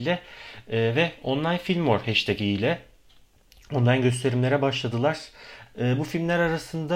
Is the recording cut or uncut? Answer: cut